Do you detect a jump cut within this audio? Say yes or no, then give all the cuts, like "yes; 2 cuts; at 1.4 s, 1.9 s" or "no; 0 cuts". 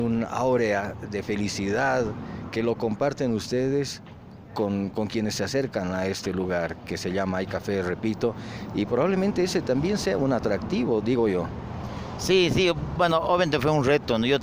no; 0 cuts